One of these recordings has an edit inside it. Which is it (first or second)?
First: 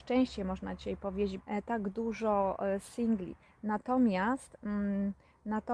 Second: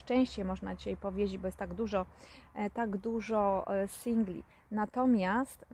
first